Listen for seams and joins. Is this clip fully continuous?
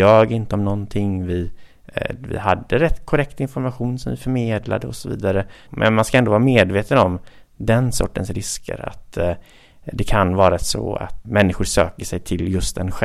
no; 2 cuts; at 5.7 s, 11.2 s

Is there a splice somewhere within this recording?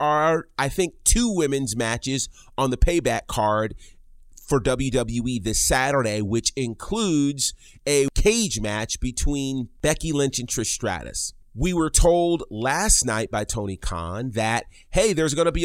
yes; 1 cut; at 11.4 s

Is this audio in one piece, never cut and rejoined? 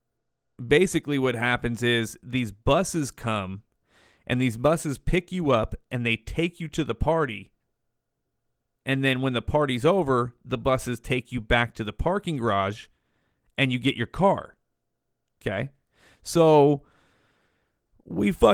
yes; 0 cuts

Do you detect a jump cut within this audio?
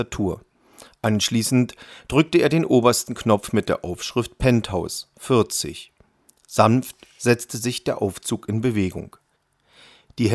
no; 0 cuts

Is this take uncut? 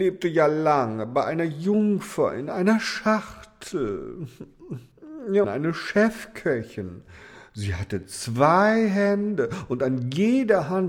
no; 1 cut; at 5.4 s

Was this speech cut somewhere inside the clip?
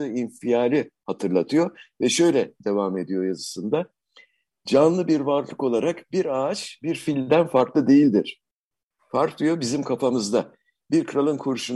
no; 0 cuts

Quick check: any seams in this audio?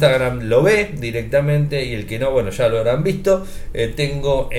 no; 0 cuts

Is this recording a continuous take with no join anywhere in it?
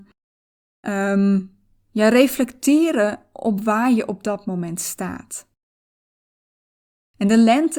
yes; 0 cuts

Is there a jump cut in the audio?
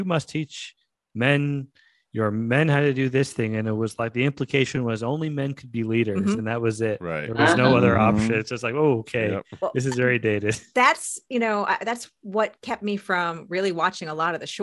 no; 0 cuts

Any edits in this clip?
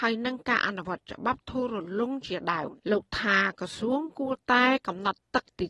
yes; 1 cut; at 2.8 s

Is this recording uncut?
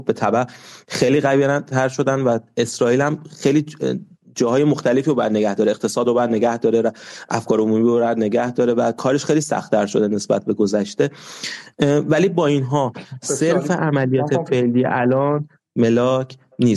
yes; 0 cuts

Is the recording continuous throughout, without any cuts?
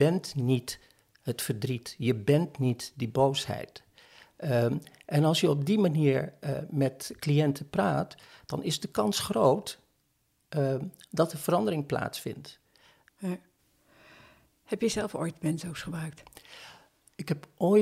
no; 1 cut; at 13.1 s

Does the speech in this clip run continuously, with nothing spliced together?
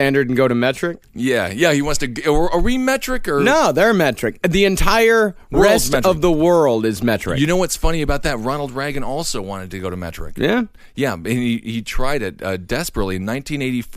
yes; 0 cuts

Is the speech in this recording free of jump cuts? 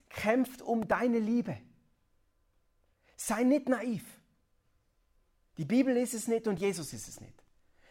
yes; 0 cuts

